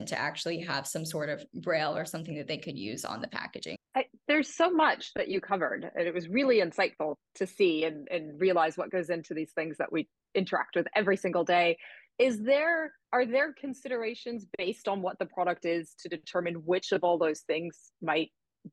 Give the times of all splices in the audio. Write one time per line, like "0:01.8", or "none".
0:03.8
0:13.0